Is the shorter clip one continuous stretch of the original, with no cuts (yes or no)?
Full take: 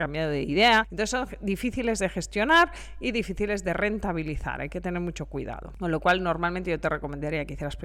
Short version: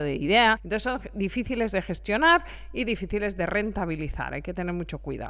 yes